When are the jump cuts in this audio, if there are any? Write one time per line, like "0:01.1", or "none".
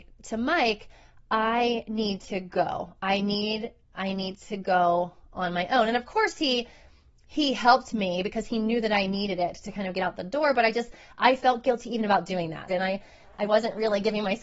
0:12.7